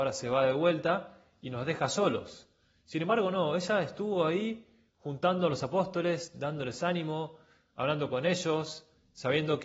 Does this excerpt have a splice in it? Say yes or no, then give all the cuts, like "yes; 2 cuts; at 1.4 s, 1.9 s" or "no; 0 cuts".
no; 0 cuts